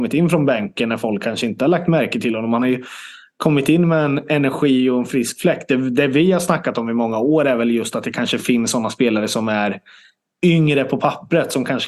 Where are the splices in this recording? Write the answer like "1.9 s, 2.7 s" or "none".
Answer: none